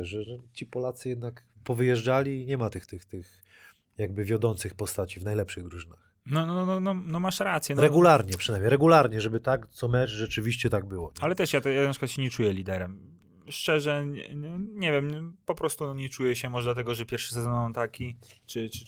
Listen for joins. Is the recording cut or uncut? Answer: uncut